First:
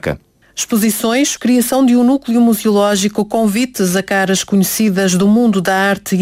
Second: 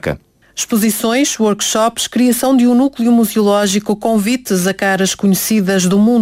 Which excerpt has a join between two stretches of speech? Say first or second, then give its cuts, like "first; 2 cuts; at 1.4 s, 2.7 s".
first; 1 cut; at 1.4 s